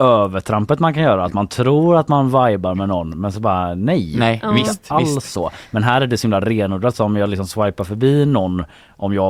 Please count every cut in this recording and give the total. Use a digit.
0